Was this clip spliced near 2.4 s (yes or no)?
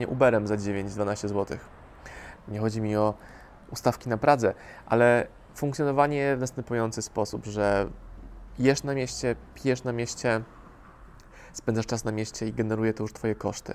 yes